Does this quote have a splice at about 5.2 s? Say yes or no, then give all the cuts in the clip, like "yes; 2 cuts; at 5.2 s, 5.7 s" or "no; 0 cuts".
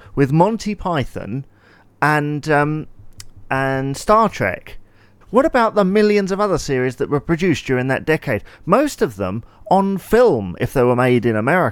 yes; 1 cut; at 5.2 s